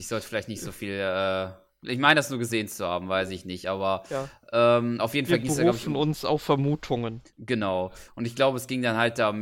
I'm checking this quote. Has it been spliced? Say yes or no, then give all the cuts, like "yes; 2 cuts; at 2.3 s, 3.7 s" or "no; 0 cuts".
no; 0 cuts